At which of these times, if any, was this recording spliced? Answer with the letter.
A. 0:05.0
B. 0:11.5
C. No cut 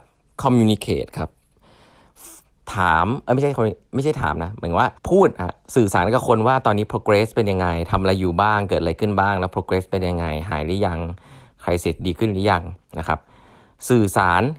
A